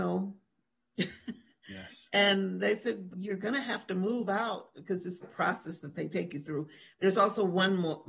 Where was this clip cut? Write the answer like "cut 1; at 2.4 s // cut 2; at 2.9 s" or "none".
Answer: cut 1; at 3.1 s // cut 2; at 5.2 s